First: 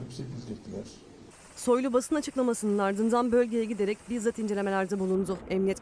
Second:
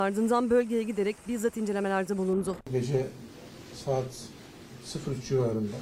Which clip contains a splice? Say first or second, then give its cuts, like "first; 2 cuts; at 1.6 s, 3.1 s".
second; 1 cut; at 2.6 s